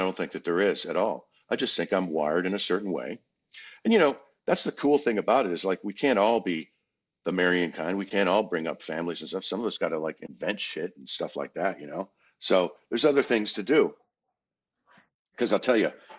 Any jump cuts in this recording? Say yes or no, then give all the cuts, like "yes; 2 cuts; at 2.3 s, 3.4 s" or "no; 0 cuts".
no; 0 cuts